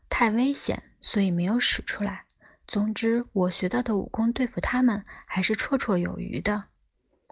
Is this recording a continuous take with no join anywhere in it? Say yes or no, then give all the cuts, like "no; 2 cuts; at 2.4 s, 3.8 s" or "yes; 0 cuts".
yes; 0 cuts